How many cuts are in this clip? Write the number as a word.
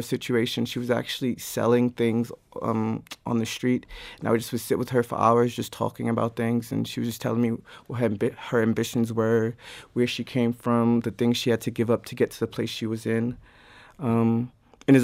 zero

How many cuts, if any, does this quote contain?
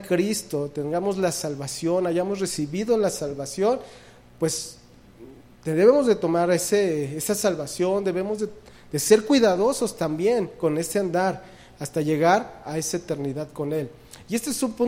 zero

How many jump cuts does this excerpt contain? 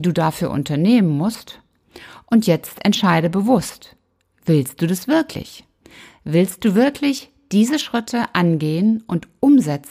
zero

